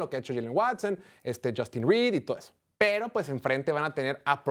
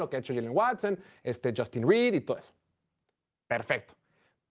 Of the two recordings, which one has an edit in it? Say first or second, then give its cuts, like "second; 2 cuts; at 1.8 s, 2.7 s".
first; 1 cut; at 2.8 s